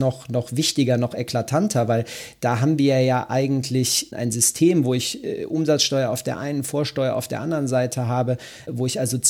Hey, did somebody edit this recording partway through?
no; 0 cuts

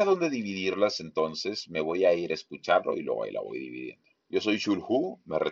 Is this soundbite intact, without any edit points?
no; 1 cut; at 4.1 s

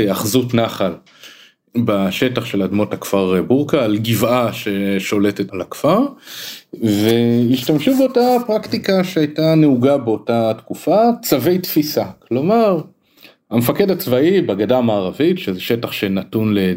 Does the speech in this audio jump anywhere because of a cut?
yes; 1 cut; at 5.5 s

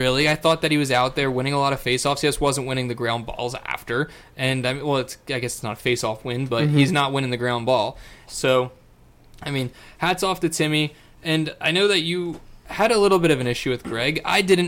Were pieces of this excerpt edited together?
yes; 2 cuts; at 6.5 s, 8.3 s

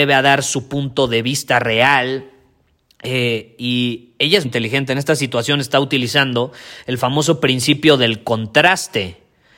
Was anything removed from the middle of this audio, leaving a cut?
yes; 1 cut; at 4.4 s

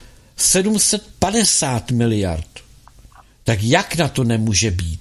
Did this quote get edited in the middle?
no; 0 cuts

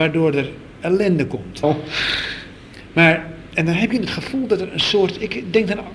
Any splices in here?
yes; 1 cut; at 1.6 s

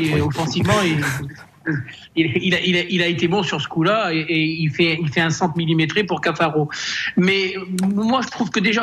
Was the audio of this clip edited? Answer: no; 0 cuts

